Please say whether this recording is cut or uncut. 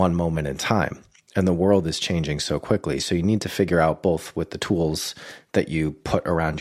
uncut